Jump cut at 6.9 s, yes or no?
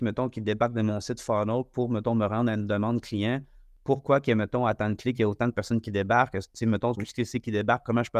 yes